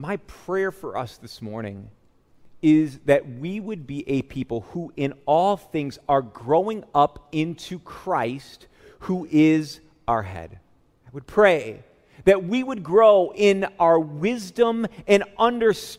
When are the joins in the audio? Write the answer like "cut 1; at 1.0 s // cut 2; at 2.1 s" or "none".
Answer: cut 1; at 10.9 s

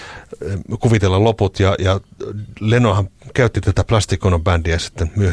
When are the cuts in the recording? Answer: none

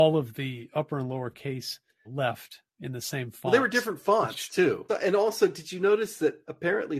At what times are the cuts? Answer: cut 1; at 2.0 s // cut 2; at 4.9 s

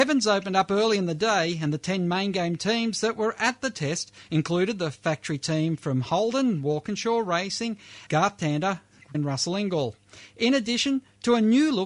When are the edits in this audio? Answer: cut 1; at 8.1 s // cut 2; at 9.1 s

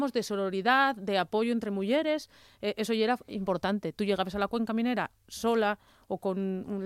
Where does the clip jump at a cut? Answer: none

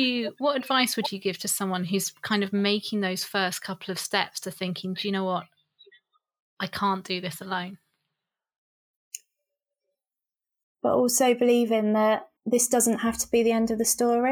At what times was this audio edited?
cut 1; at 10.6 s // cut 2; at 12.4 s

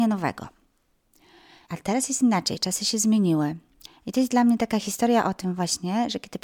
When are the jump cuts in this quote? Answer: cut 1; at 1.6 s // cut 2; at 3.9 s

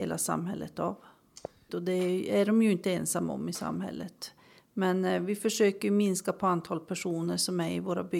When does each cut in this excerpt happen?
cut 1; at 1.7 s

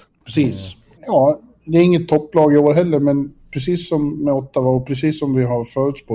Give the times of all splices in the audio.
cut 1; at 1.0 s

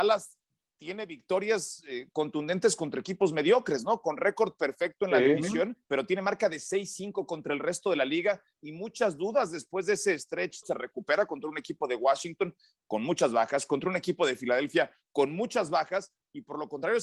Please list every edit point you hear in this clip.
cut 1; at 5.8 s // cut 2; at 10.6 s

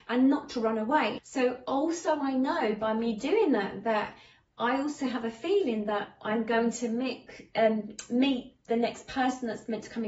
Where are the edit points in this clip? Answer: cut 1; at 1.2 s

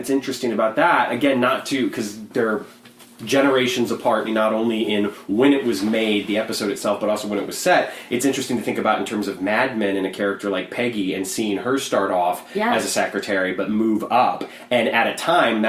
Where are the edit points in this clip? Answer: cut 1; at 4.2 s

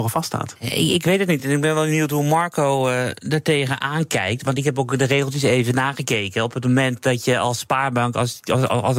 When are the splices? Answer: none

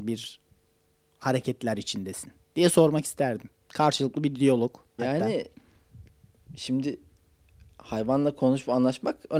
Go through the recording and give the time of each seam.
cut 1; at 5.0 s

